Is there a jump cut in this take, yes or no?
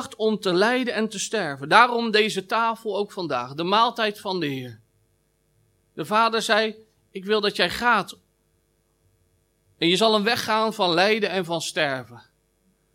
no